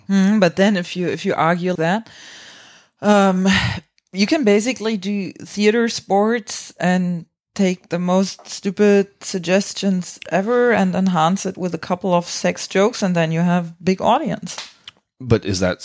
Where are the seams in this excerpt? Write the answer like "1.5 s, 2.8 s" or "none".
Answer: 1.8 s